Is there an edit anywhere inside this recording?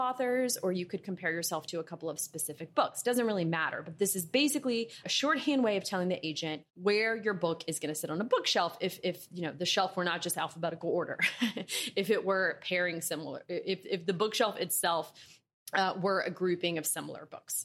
yes; 2 cuts; at 5.0 s, 6.7 s

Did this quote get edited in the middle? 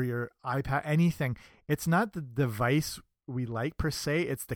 no; 0 cuts

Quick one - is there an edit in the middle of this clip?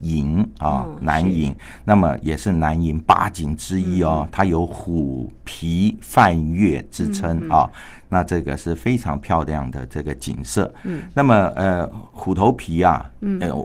no; 0 cuts

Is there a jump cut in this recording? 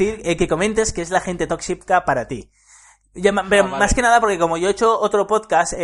no; 0 cuts

